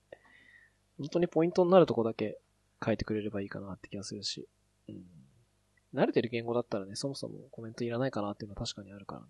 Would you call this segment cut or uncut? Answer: uncut